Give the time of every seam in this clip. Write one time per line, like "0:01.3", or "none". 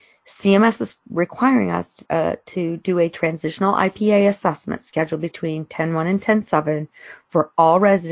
none

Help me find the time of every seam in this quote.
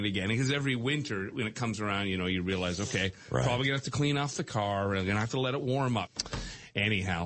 0:06.1

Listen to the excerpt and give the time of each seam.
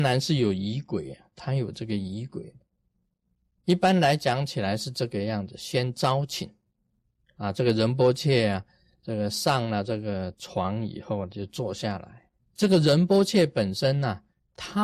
0:12.4

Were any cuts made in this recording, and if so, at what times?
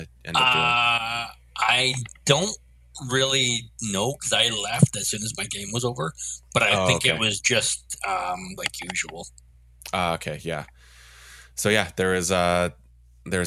0:08.6

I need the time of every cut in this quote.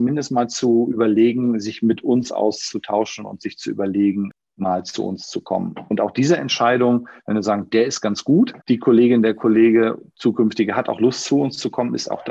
0:08.6

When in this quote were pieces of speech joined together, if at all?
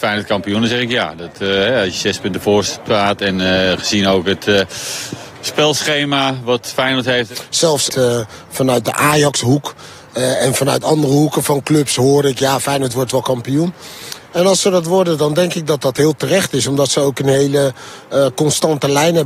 0:07.9

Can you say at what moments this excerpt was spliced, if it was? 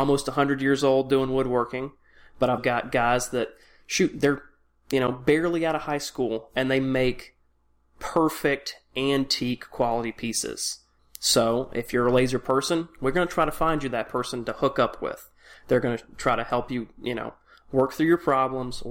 0:02.6
0:11.0

